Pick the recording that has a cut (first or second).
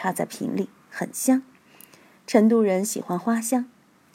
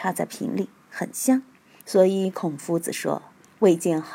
second